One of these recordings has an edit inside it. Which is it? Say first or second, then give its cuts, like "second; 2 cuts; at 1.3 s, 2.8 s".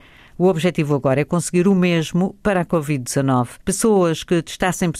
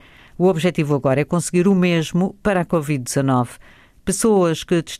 first; 1 cut; at 3.6 s